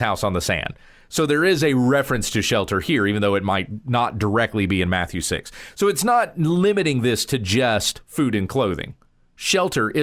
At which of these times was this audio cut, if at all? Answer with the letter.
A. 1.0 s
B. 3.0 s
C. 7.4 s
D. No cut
D